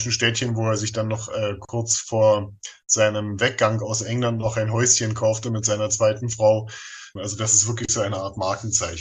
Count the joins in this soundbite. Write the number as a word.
one